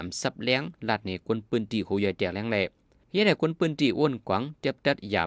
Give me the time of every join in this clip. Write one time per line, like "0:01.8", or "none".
none